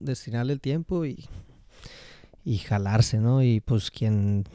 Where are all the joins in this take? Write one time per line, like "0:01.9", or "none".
none